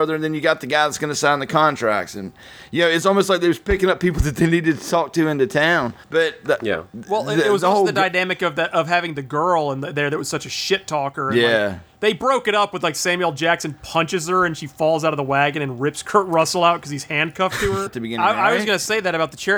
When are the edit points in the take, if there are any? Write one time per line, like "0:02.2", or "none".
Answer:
0:06.0
0:17.9